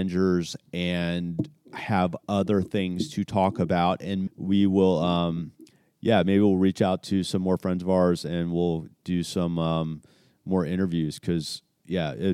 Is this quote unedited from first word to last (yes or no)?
no